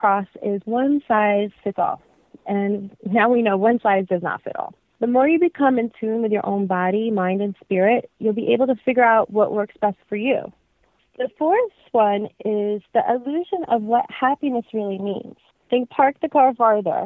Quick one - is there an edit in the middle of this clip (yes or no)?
yes